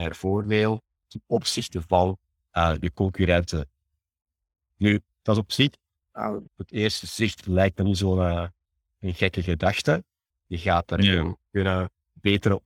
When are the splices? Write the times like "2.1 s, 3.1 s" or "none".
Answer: 6.5 s, 10.3 s